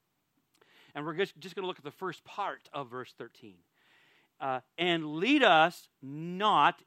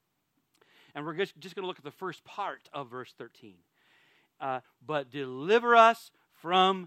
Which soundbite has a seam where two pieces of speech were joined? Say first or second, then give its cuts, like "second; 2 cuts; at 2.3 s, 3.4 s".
second; 1 cut; at 4.6 s